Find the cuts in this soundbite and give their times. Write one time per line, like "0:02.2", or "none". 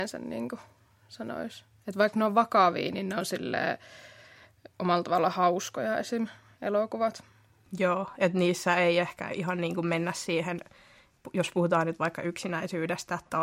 none